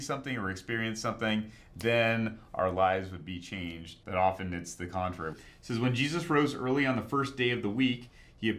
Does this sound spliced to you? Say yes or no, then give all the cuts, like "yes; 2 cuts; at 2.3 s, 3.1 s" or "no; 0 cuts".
yes; 2 cuts; at 4.0 s, 5.3 s